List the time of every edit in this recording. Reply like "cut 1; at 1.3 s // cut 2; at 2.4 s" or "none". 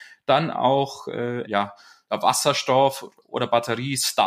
cut 1; at 1.4 s